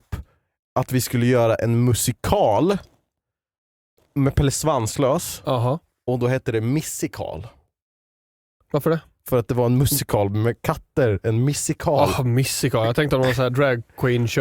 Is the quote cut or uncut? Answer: uncut